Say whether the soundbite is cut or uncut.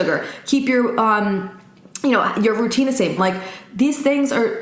cut